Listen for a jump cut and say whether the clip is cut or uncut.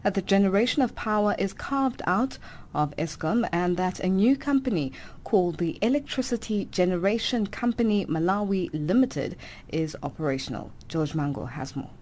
uncut